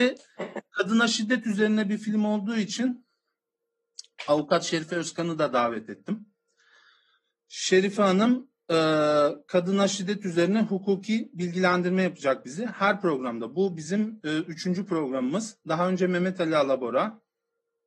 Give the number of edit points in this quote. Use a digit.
0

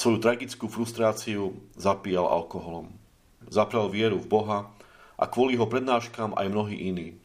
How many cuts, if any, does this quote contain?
1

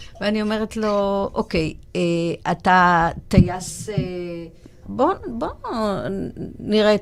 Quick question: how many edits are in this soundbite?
1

